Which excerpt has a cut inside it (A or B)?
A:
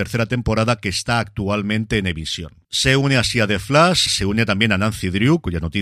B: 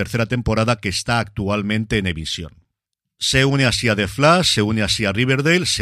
A